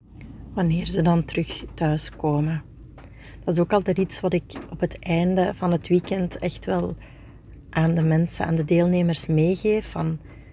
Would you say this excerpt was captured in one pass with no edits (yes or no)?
yes